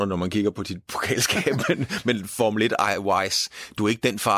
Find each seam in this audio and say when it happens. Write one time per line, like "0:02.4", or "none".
none